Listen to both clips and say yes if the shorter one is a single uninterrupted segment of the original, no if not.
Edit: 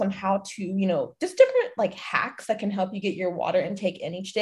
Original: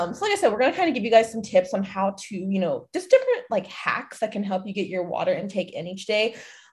yes